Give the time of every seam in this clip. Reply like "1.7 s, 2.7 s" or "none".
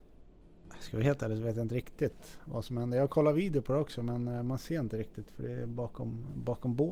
none